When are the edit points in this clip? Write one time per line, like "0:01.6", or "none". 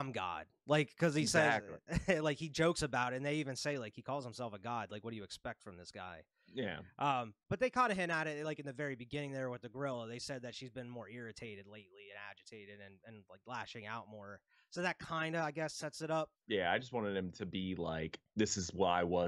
0:16.3